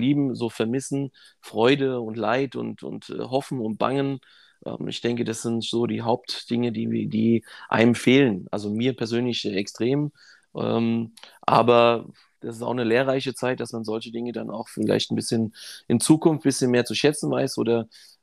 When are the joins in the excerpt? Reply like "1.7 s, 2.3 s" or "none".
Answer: none